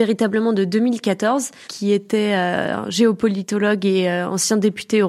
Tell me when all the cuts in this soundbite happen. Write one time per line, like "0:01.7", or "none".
0:01.6